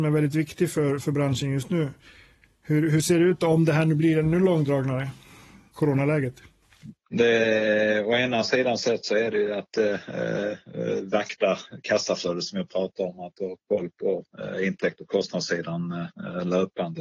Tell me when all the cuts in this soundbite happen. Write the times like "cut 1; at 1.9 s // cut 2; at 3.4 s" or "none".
none